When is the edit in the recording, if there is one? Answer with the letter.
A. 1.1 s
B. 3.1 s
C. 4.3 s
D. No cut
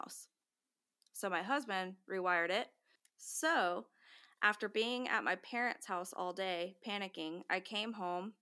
B